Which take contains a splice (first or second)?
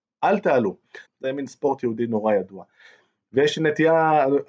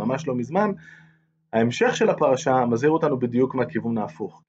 first